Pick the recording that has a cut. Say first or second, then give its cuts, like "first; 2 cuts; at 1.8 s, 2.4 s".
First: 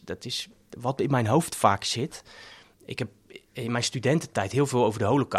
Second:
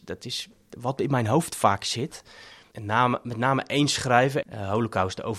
second; 2 cuts; at 2.7 s, 4.4 s